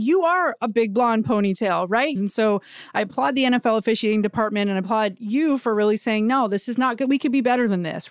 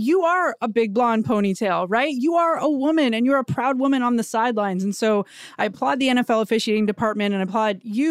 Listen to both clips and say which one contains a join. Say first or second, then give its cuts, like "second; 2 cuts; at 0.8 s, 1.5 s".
first; 1 cut; at 2.2 s